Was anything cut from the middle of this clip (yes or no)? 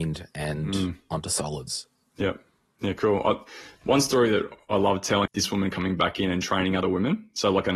yes